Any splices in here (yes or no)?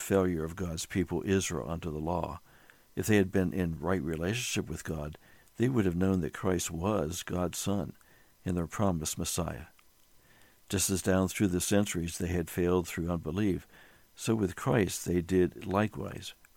no